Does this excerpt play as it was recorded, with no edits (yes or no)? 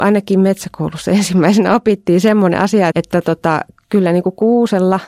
no